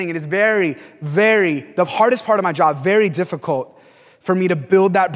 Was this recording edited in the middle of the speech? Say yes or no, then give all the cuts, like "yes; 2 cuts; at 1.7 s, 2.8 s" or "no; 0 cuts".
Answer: no; 0 cuts